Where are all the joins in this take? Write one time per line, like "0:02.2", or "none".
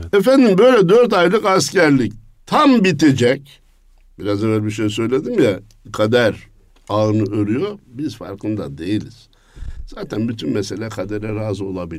none

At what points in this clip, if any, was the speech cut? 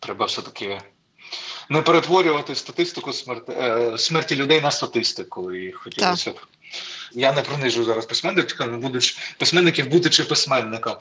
0:07.1

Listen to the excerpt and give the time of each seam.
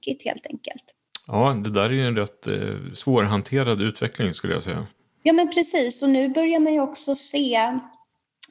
none

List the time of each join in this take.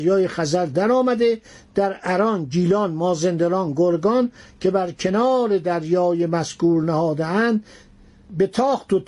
none

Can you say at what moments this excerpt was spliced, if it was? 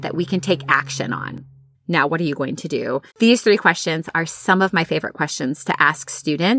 0:01.7
0:03.1

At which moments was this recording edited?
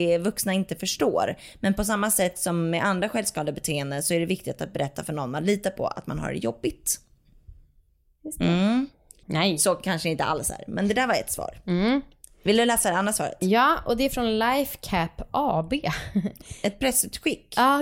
0:09.2

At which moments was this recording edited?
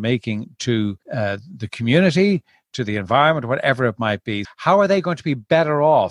0:01.0
0:04.4

